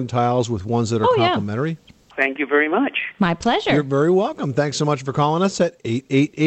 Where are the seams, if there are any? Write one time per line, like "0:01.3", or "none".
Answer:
0:02.1

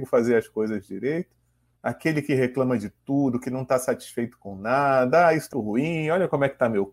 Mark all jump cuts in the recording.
0:01.8
0:05.5

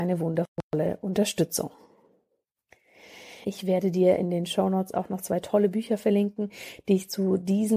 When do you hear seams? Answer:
0:03.4

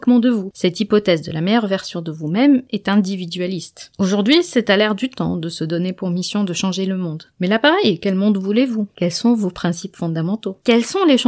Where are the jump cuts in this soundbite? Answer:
0:03.9

